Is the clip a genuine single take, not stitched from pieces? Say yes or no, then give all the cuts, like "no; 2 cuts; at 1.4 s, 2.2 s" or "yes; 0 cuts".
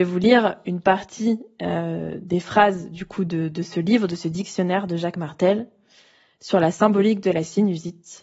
yes; 0 cuts